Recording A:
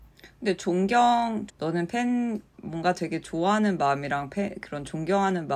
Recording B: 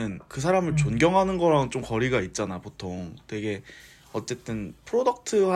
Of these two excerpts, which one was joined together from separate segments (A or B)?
A